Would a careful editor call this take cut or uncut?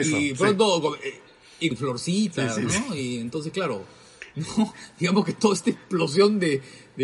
cut